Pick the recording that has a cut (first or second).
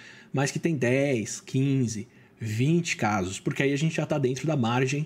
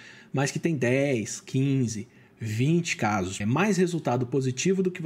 second